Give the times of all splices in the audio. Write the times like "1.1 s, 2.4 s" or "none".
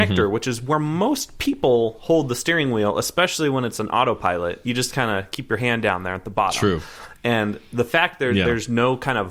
none